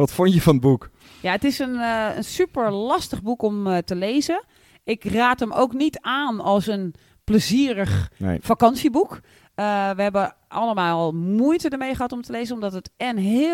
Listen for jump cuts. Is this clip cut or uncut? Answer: uncut